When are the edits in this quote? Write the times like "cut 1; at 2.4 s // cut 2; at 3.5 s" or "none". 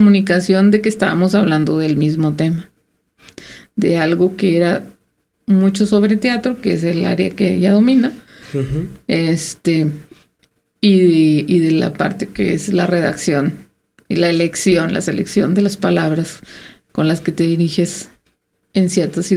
none